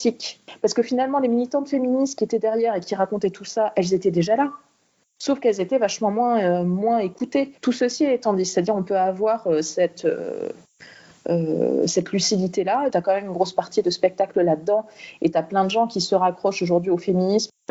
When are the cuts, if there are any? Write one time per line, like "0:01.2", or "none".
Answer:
0:07.6
0:12.9